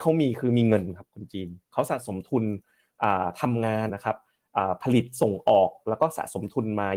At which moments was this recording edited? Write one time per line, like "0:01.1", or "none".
0:03.9